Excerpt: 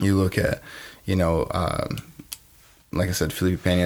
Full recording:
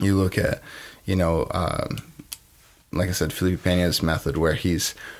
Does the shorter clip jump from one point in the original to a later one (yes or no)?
no